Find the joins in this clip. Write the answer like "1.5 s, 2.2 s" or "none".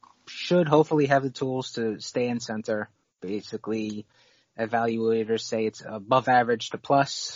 3.0 s